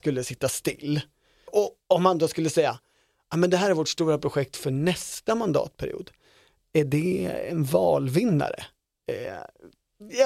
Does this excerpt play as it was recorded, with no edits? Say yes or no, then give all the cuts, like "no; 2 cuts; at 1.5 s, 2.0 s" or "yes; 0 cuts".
no; 1 cut; at 1.5 s